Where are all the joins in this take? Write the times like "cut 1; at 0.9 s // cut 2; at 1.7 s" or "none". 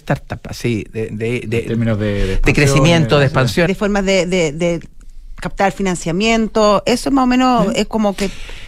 cut 1; at 1.1 s // cut 2; at 3.7 s